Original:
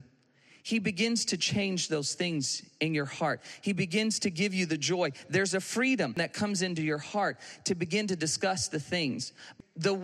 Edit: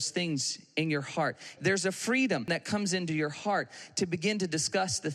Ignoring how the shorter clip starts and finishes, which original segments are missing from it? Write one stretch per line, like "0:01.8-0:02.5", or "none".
0:03.6-0:05.3